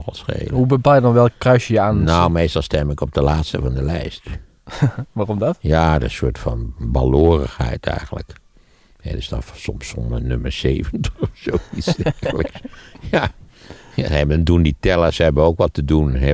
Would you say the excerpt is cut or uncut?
uncut